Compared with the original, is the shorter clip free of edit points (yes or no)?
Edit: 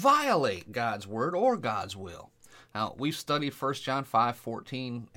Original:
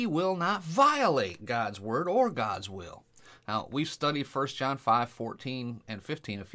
yes